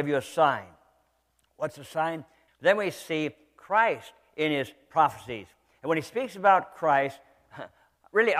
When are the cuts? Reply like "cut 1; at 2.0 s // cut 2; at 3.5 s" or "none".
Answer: cut 1; at 2.5 s